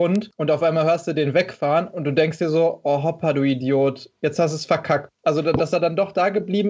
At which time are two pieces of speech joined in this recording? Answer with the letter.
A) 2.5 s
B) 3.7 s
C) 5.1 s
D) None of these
C